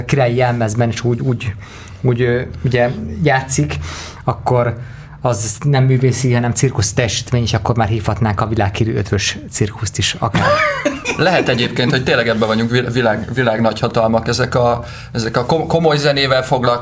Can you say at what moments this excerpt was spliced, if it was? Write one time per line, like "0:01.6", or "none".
none